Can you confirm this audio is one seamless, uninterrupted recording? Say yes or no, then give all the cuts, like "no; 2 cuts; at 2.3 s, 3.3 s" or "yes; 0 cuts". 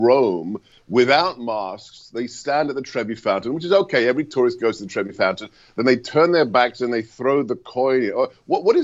yes; 0 cuts